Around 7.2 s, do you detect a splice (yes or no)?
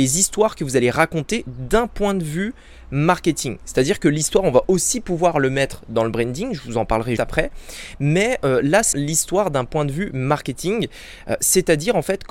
yes